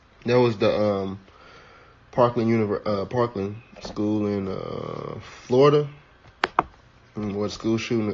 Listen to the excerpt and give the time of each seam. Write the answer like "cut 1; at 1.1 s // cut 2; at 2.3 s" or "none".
none